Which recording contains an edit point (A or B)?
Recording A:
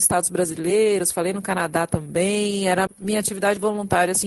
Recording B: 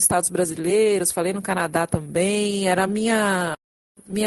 A